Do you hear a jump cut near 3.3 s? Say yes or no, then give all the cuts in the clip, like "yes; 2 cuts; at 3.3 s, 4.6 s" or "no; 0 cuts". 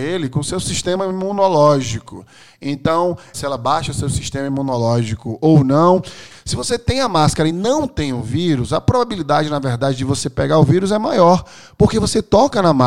yes; 2 cuts; at 3.3 s, 6.3 s